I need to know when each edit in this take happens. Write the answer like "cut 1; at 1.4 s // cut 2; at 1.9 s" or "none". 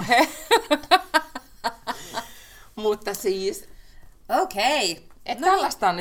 none